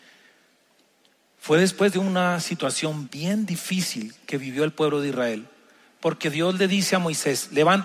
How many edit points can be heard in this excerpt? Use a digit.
1